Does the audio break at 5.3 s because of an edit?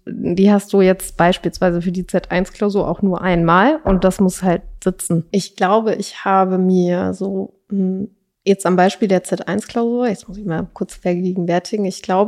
yes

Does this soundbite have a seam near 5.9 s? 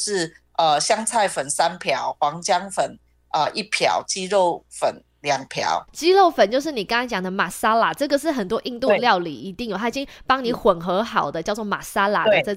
yes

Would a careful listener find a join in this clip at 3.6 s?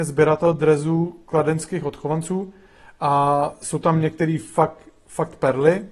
no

